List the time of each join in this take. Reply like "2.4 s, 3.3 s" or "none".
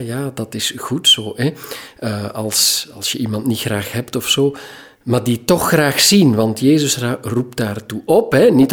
none